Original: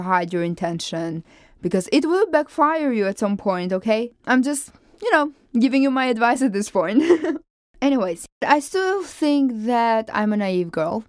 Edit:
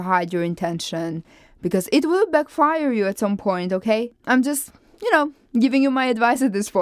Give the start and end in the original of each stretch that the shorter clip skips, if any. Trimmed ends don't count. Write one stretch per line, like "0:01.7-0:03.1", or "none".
none